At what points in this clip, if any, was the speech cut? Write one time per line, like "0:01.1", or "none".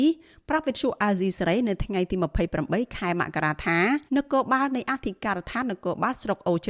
0:04.1